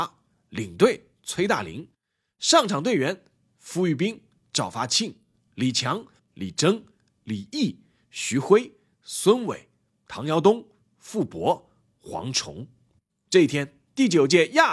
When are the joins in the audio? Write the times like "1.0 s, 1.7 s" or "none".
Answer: 6.2 s, 13.1 s